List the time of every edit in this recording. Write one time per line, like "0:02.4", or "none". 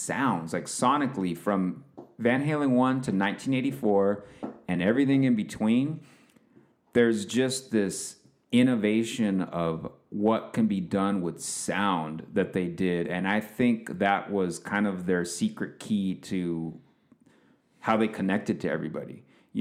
none

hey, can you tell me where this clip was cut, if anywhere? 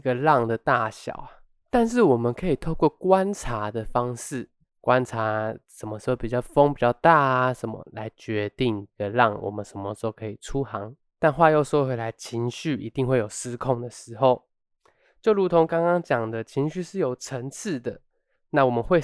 none

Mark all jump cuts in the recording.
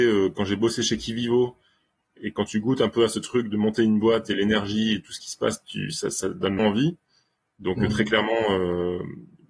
0:06.6

